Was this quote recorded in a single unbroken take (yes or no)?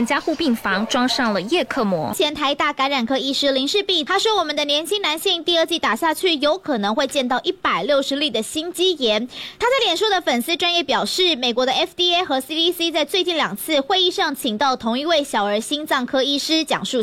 yes